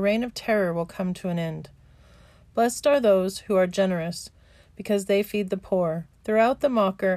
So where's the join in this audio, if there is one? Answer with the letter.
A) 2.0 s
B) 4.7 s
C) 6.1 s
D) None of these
C